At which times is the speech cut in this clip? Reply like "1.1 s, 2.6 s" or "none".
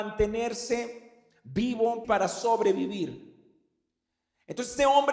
2.0 s